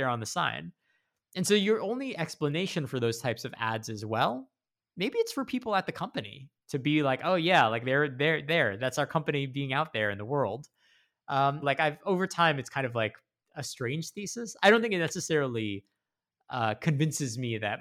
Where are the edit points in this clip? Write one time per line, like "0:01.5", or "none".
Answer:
0:11.6